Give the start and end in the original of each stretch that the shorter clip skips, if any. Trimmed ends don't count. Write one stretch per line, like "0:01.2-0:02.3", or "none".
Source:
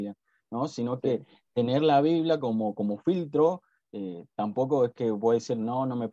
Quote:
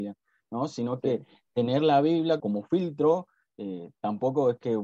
0:02.4-0:02.7